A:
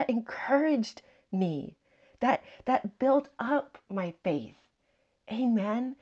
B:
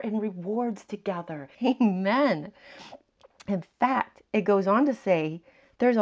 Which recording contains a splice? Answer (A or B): B